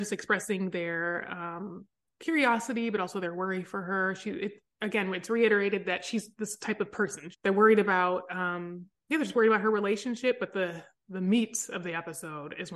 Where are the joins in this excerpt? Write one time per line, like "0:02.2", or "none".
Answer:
0:07.3